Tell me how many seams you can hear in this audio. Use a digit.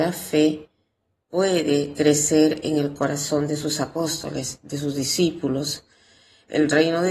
0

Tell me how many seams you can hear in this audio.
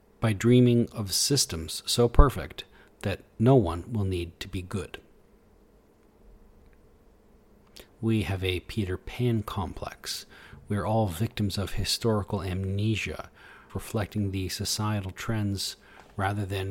2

